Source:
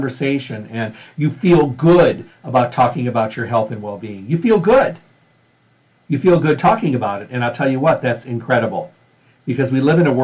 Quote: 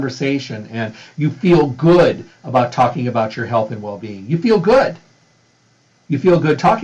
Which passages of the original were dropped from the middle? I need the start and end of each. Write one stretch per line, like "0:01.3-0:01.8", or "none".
none